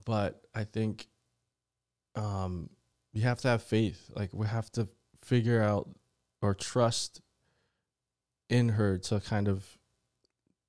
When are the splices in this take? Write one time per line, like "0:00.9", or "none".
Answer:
none